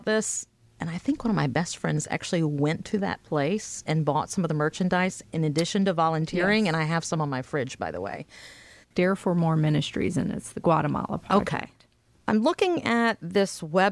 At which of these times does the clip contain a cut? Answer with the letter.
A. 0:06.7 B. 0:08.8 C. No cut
B